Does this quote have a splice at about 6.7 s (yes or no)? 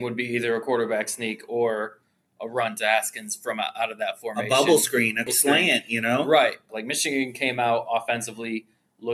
yes